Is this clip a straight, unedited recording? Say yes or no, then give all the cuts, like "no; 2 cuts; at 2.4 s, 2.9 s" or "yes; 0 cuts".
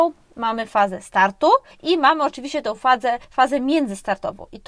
yes; 0 cuts